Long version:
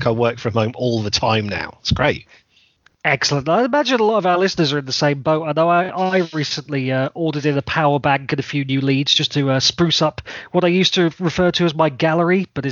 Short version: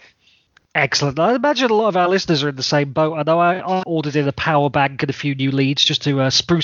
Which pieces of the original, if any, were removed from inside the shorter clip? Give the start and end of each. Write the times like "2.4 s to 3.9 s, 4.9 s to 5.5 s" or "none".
6.1 s to 7.1 s

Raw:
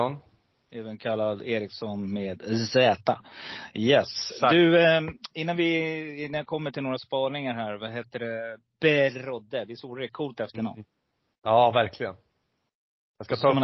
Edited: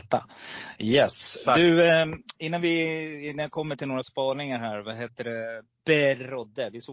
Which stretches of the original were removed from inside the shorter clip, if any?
none

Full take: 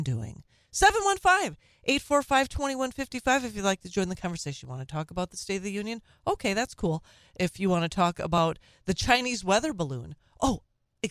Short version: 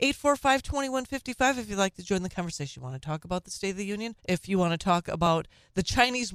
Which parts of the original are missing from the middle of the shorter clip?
6.0 s to 7.3 s

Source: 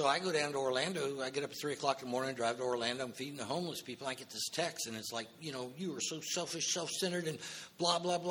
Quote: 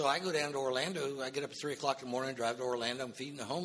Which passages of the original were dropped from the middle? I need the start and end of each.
none

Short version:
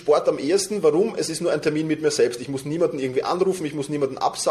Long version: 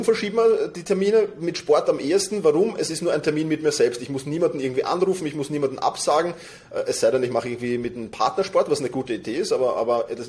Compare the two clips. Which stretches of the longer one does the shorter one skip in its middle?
none

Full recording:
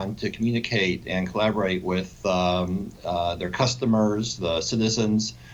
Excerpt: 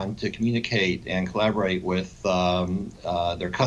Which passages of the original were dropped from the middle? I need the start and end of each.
none

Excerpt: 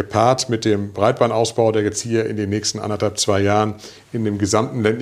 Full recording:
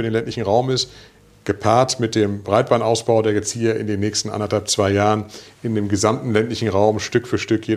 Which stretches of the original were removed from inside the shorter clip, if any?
none

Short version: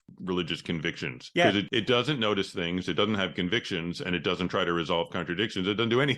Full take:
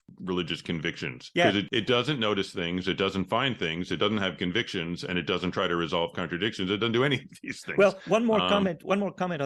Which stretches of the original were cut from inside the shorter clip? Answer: 2.8 s to 3.9 s

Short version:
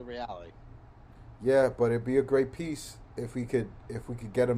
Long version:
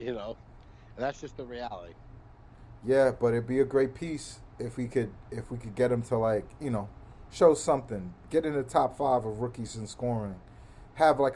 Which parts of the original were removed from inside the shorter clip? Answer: none

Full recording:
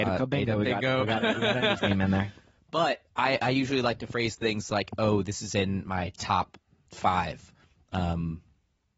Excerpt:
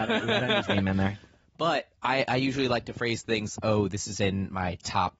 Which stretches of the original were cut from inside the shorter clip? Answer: 4.7 s to 4.9 s

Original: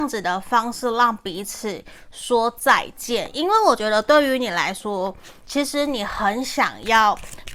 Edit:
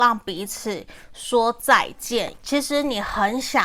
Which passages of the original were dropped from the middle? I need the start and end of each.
3.3 s to 5.4 s

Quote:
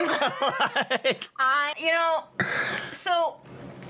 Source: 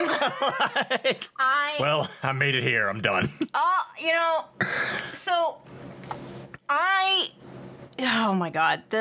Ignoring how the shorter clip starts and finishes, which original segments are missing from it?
1.7 s to 3.9 s

